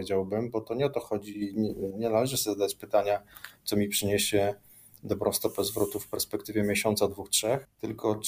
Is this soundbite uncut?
yes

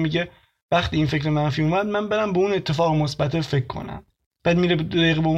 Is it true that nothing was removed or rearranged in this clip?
yes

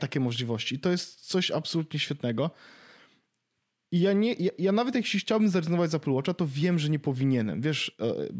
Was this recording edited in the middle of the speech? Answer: no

